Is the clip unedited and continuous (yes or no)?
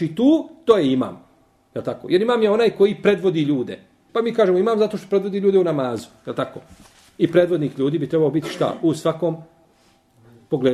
no